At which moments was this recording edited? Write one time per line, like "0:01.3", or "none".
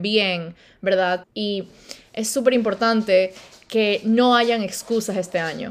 0:01.2

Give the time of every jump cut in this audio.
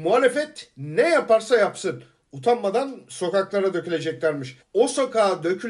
0:04.6

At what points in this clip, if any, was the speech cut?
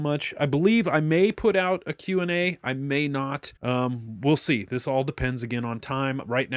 0:03.6

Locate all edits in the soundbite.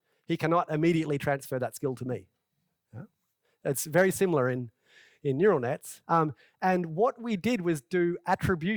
0:06.0

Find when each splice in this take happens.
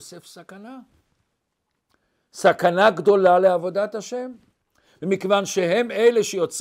none

